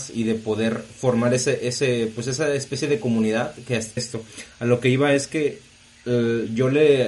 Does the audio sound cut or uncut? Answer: cut